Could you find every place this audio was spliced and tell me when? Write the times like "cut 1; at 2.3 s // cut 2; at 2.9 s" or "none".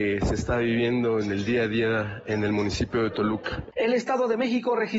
none